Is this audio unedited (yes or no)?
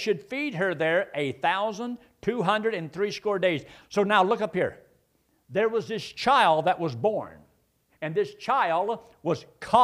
no